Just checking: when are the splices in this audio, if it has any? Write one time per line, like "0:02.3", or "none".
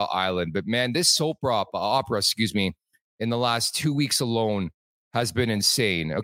none